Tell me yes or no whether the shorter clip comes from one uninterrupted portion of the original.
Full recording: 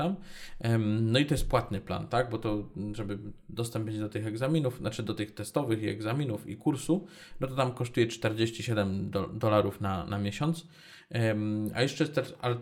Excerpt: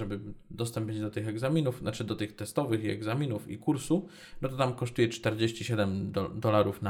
yes